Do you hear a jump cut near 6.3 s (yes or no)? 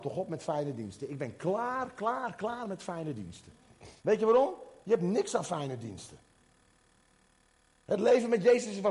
no